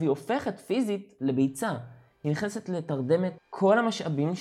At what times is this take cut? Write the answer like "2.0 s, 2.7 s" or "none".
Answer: none

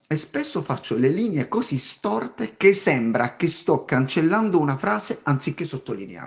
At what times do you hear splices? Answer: none

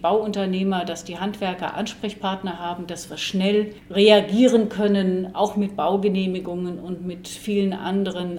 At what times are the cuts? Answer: none

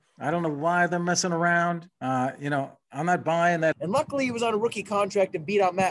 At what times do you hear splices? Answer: 1.9 s, 3.7 s

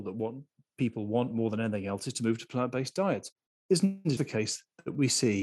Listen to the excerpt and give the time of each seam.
4.2 s

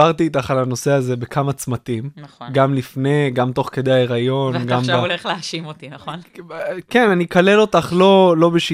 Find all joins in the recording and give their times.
none

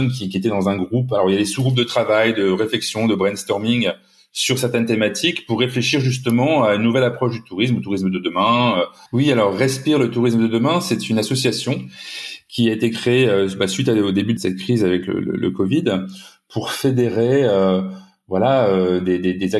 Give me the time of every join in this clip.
9.1 s, 14.4 s

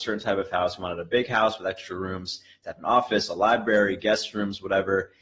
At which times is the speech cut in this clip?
none

